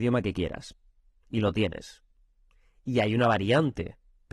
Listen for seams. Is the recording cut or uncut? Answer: uncut